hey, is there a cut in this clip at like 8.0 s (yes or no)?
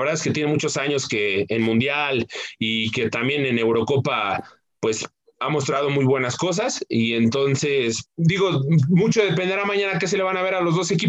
yes